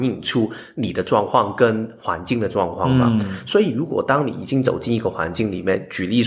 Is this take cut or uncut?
uncut